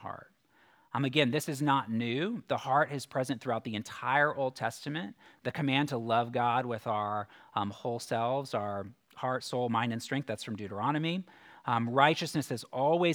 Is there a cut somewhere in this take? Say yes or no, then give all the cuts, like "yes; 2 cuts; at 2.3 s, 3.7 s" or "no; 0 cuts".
no; 0 cuts